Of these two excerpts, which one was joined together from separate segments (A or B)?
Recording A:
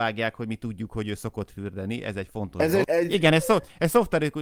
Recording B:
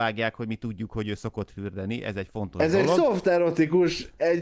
A